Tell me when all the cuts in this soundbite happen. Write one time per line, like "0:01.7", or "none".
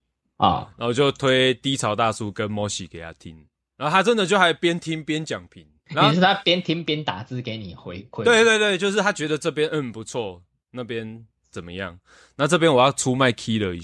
none